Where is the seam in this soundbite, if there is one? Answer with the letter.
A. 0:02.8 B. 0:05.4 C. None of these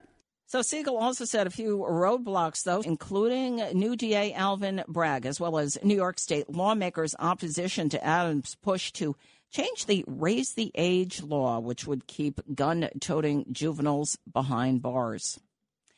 A